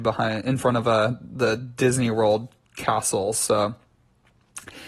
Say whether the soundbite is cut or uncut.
uncut